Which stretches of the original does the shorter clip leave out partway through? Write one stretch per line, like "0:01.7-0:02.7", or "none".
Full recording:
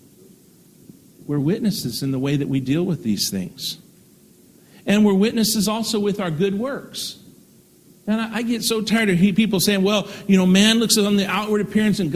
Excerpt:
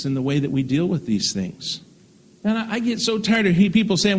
0:04.3-0:08.0